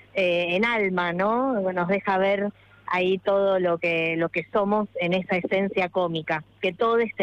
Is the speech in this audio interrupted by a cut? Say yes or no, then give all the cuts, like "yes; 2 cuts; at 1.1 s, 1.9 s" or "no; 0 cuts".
no; 0 cuts